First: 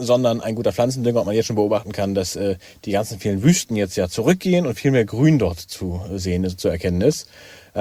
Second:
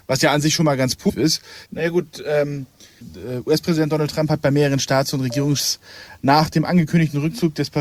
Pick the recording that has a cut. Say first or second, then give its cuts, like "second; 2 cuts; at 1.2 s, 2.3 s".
second; 2 cuts; at 1.7 s, 3.0 s